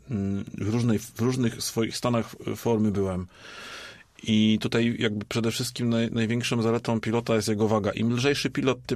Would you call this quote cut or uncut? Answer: uncut